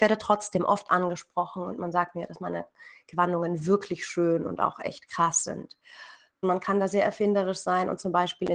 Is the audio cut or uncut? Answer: cut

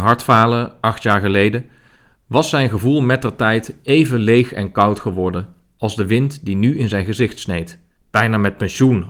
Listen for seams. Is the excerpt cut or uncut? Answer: cut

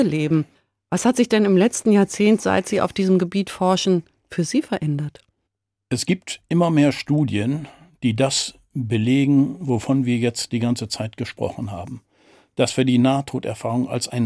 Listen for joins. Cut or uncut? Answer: uncut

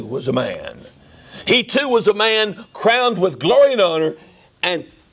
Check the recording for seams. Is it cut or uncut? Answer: uncut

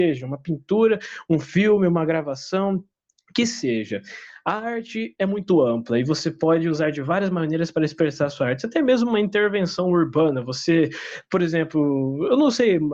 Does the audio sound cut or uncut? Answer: uncut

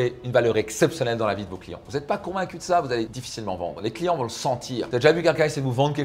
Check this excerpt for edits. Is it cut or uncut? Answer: uncut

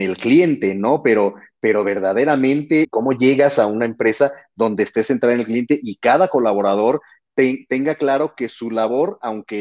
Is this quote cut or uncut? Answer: cut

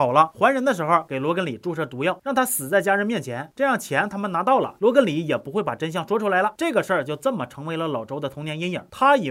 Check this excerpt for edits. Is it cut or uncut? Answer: cut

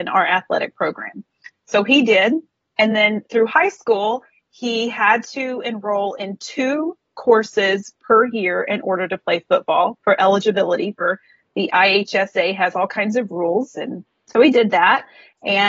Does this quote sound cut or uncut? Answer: uncut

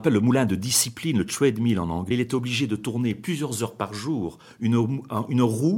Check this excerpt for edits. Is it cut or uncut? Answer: uncut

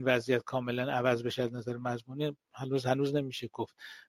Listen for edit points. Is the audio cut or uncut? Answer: uncut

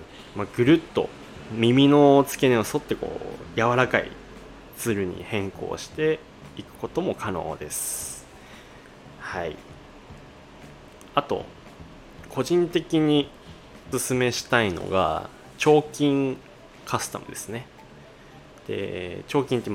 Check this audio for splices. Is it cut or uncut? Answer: cut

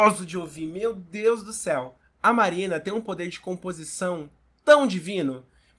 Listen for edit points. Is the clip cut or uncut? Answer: uncut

